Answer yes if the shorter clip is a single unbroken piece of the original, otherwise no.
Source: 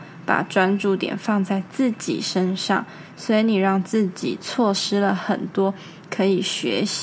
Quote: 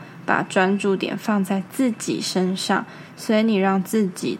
yes